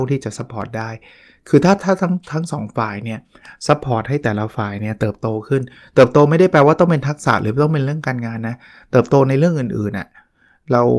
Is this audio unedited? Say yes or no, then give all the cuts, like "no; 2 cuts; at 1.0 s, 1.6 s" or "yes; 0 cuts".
yes; 0 cuts